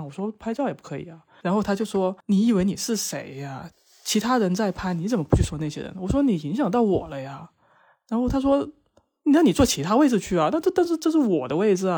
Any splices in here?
no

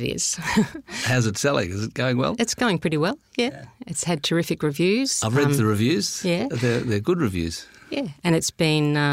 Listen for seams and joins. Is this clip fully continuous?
yes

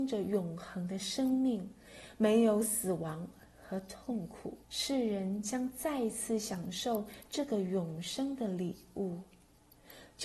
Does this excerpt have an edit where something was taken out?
yes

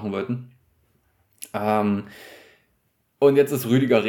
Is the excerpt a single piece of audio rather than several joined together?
yes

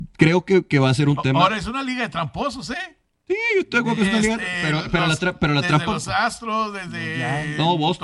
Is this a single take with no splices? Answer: yes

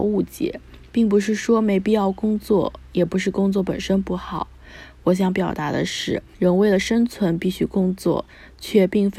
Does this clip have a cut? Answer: yes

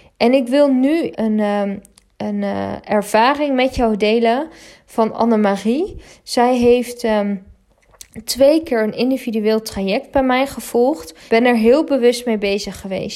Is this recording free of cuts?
no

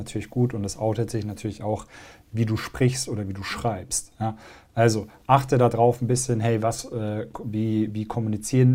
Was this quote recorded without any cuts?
yes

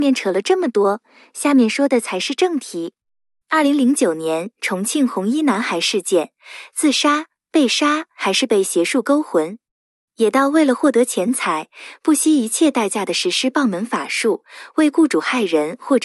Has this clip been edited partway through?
no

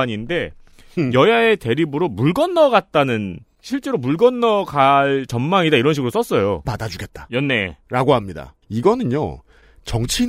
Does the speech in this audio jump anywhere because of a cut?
yes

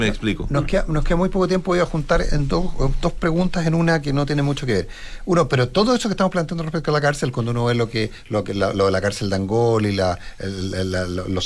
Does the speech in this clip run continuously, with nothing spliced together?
yes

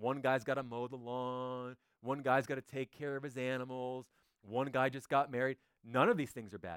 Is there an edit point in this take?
no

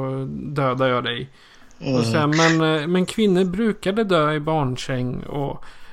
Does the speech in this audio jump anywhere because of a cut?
no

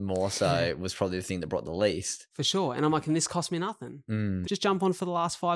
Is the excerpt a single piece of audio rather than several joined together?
no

